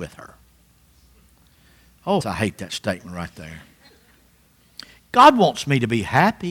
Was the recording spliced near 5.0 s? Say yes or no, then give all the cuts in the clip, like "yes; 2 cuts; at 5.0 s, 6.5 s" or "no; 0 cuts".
no; 1 cut; at 2.2 s